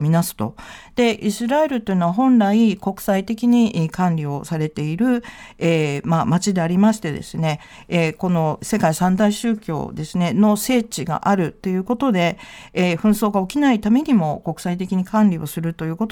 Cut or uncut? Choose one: uncut